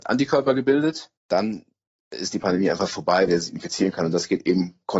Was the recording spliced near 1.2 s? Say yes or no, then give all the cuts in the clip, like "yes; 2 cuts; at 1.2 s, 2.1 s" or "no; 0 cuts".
yes; 2 cuts; at 1.2 s, 3.3 s